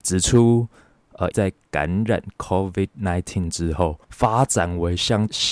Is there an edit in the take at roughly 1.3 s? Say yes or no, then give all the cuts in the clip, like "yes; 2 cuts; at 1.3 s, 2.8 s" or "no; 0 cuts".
yes; 2 cuts; at 1.3 s, 4.0 s